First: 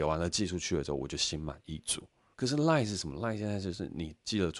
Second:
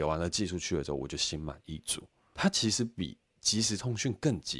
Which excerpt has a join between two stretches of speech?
first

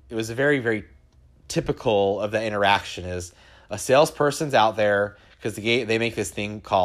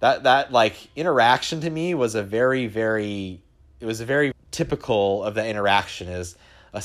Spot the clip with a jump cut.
second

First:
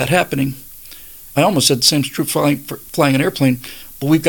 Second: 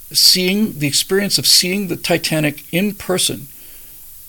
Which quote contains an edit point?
first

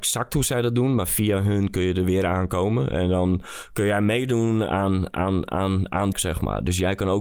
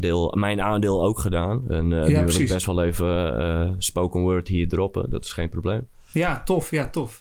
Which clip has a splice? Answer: first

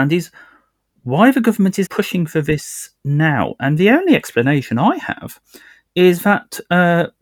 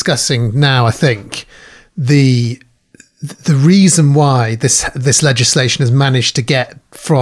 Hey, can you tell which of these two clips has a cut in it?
first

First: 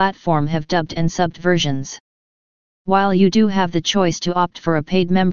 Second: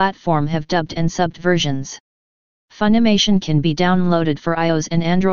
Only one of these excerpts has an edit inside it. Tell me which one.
second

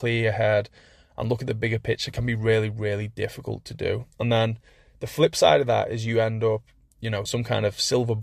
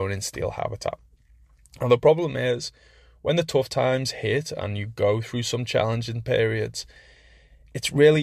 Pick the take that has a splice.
first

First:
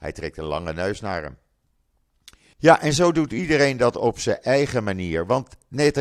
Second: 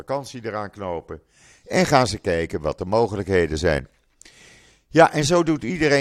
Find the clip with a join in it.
first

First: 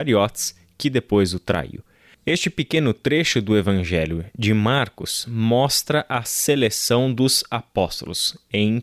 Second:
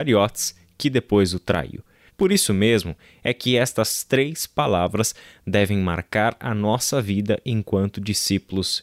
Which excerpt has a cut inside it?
second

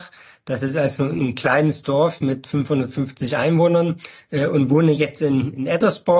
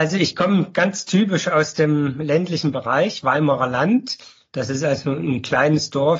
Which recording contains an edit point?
second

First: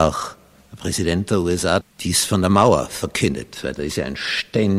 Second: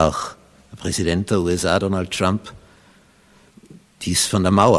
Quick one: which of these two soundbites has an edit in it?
first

